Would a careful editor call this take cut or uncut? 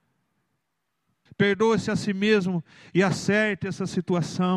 cut